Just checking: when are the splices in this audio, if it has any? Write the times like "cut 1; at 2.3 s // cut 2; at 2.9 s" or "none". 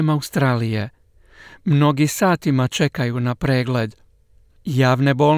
none

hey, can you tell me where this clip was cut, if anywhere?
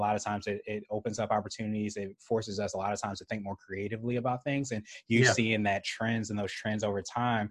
none

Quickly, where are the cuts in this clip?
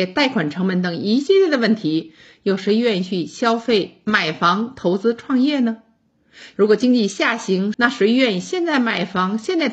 cut 1; at 6.5 s // cut 2; at 7.7 s

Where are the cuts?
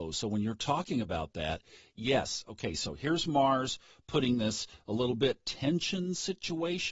none

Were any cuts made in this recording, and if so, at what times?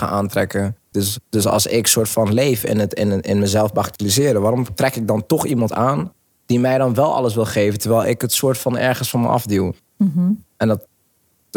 cut 1; at 0.9 s

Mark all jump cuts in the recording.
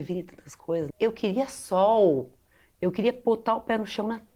cut 1; at 0.9 s

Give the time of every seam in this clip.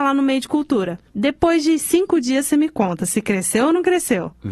cut 1; at 1.1 s

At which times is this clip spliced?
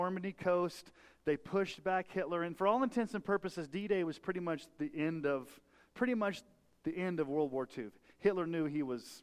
none

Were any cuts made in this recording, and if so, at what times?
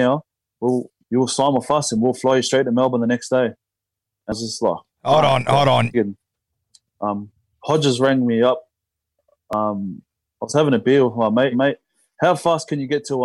cut 1; at 5.9 s // cut 2; at 11.5 s

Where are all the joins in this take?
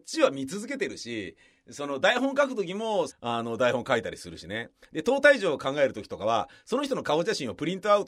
cut 1; at 3.1 s

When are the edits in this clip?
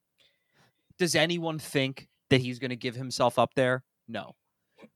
cut 1; at 0.9 s

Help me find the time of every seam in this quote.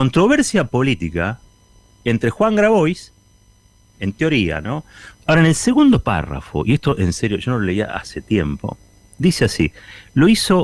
cut 1; at 3.9 s // cut 2; at 5.2 s

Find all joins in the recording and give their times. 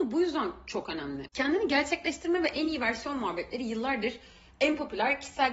none

